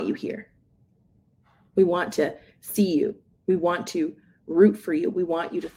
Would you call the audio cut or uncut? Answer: uncut